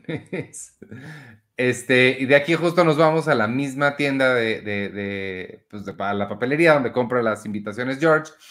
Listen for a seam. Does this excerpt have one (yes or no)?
no